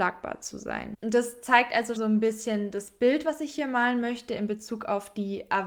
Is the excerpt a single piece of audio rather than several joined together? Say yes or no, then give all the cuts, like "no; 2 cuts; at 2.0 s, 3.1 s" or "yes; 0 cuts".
no; 1 cut; at 2.0 s